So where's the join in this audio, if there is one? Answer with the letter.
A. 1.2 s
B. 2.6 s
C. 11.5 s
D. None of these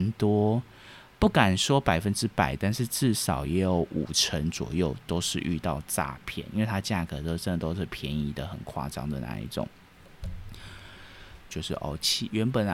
C